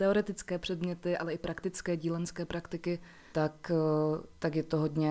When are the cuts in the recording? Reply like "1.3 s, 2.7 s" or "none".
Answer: 3.3 s